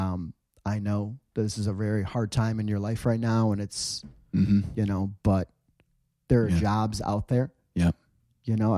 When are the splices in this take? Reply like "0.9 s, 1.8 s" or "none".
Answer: none